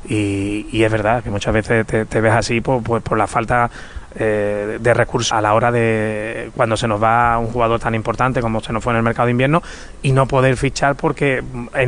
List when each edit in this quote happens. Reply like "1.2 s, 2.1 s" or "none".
5.3 s